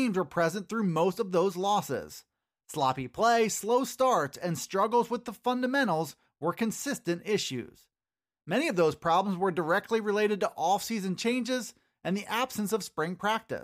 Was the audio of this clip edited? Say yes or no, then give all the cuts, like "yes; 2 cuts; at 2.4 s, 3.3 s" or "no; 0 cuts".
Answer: no; 0 cuts